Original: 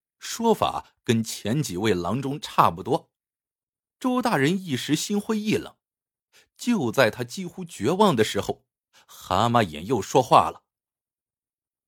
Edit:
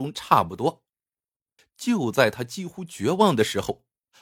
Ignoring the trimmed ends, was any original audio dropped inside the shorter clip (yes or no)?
yes